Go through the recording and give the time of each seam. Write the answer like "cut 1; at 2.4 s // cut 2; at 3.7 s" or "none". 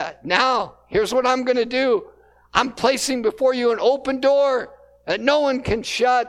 none